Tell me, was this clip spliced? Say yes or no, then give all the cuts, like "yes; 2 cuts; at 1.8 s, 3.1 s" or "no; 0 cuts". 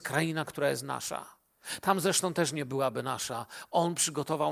no; 0 cuts